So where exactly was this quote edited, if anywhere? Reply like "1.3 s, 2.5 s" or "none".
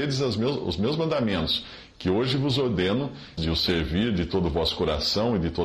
3.4 s